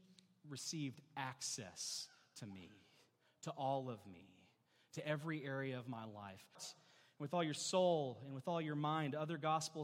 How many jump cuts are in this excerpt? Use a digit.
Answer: 1